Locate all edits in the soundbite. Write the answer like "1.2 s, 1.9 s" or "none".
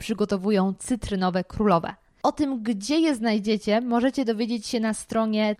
none